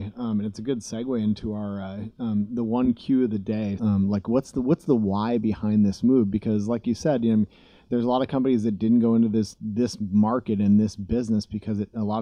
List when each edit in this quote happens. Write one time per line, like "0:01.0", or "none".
0:03.8